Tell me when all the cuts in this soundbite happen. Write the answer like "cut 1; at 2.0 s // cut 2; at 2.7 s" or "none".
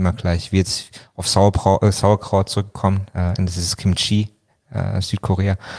cut 1; at 3.4 s